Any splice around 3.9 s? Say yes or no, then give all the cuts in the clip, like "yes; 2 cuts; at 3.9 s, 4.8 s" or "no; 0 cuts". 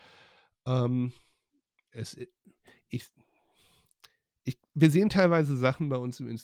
no; 0 cuts